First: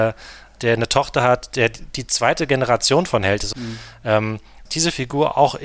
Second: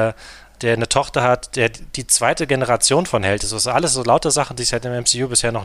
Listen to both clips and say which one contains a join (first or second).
first